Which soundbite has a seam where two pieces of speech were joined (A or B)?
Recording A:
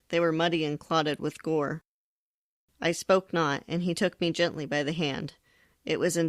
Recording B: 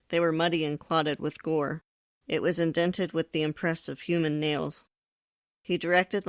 B